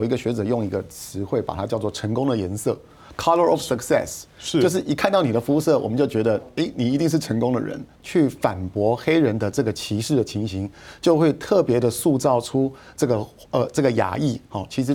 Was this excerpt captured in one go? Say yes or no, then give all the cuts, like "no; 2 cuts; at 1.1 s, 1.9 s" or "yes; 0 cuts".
no; 1 cut; at 7.9 s